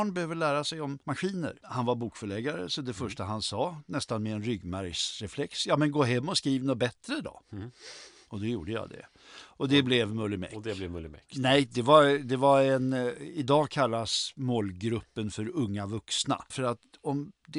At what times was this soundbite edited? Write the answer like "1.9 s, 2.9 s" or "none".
11.3 s, 16.5 s